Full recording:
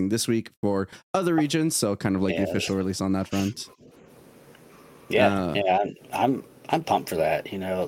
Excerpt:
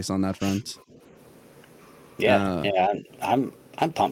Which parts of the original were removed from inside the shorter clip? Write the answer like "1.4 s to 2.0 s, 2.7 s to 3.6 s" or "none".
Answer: none